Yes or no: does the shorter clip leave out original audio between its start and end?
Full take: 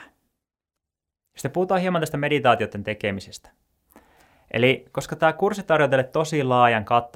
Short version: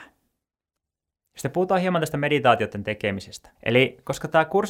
yes